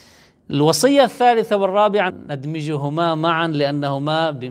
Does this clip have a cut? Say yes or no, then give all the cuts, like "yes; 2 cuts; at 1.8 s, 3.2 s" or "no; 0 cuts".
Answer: yes; 1 cut; at 2.1 s